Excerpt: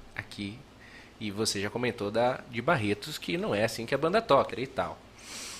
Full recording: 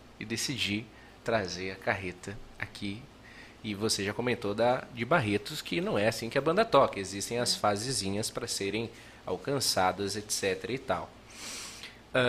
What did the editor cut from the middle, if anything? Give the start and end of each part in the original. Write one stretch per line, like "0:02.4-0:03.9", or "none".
0:06.9-0:10.6